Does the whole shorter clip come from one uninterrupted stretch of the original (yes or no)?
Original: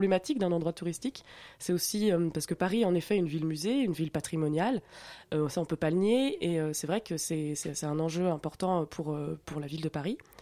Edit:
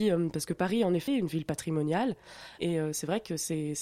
no